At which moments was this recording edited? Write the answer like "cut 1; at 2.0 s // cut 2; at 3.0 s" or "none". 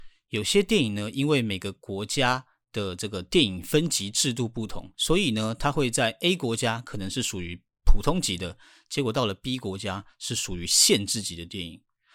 none